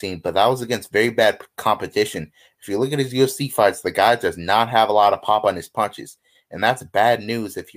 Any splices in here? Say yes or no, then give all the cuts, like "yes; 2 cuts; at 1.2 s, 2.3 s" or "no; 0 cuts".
no; 0 cuts